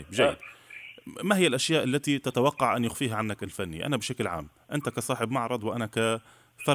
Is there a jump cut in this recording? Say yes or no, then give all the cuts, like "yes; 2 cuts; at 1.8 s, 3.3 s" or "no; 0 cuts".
no; 0 cuts